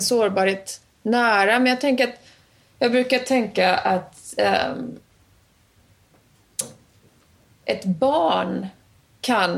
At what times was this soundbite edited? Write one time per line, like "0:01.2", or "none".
none